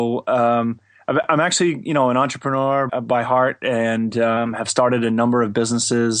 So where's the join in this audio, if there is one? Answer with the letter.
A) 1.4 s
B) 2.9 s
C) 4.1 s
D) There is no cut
B